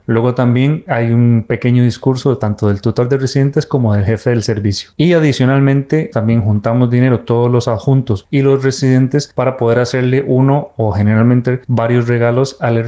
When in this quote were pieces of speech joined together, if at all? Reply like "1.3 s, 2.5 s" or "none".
6.1 s